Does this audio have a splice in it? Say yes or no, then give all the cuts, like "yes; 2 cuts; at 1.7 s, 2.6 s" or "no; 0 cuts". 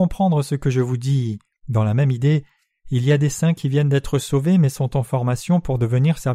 yes; 1 cut; at 1.5 s